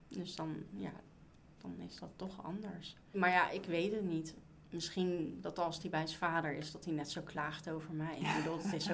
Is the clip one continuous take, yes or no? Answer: no